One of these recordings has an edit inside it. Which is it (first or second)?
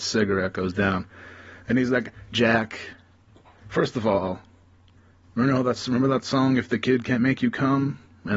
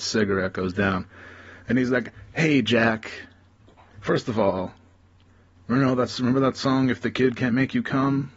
first